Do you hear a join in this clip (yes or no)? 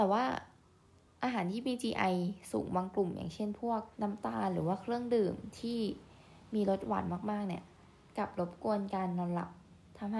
yes